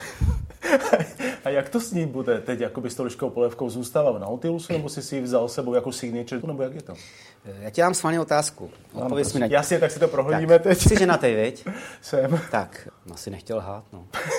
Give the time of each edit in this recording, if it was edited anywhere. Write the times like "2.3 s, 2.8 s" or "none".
6.4 s, 9.5 s, 12.9 s